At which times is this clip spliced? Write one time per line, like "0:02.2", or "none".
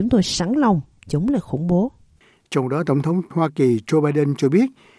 none